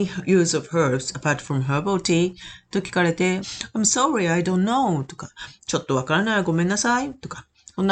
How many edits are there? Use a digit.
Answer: 2